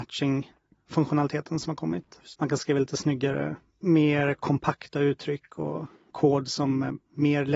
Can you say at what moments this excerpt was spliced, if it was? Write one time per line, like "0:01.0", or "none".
0:02.3